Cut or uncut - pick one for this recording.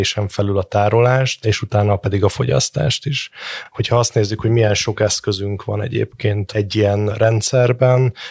uncut